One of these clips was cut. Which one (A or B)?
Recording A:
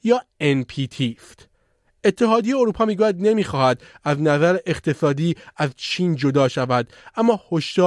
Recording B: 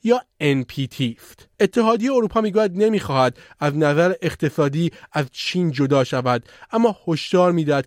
B